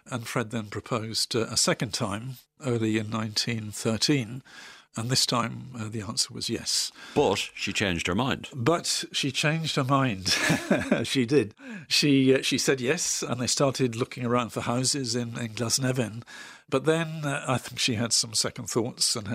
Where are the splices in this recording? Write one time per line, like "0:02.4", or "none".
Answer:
0:13.3